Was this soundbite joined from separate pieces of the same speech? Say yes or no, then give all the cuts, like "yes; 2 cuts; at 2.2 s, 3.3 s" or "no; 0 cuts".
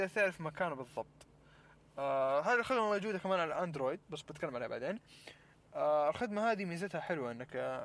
yes; 1 cut; at 4.0 s